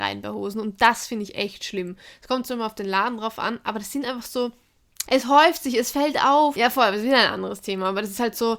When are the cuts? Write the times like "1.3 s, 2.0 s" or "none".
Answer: 5.0 s, 6.5 s

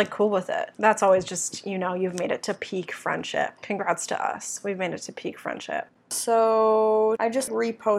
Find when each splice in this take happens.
none

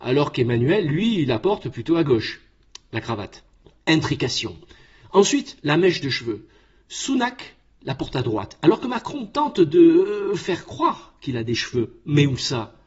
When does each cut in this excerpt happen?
none

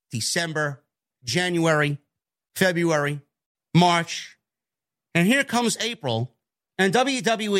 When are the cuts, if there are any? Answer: none

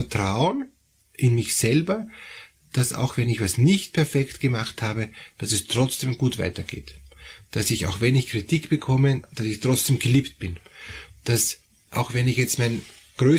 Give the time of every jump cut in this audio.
none

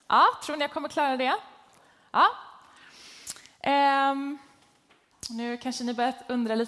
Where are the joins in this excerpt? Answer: 5.1 s

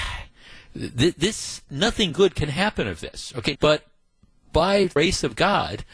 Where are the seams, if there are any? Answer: 3.5 s

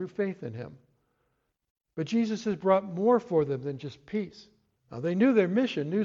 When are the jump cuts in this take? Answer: 4.8 s

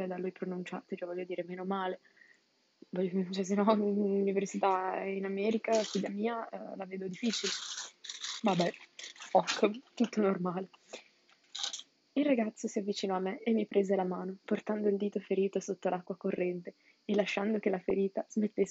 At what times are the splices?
8.4 s

